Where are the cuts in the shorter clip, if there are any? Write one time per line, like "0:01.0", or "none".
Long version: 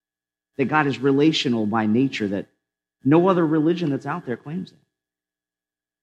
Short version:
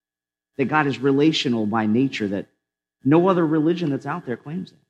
none